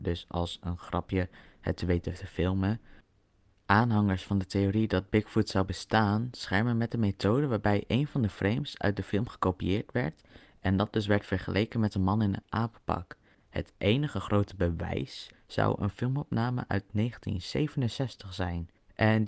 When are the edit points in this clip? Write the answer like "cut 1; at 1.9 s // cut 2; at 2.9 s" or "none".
cut 1; at 13.4 s // cut 2; at 15.3 s